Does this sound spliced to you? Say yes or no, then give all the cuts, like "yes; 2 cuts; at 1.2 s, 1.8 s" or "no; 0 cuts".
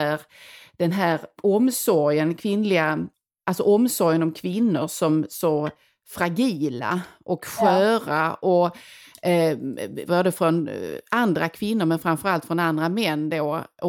yes; 1 cut; at 10.0 s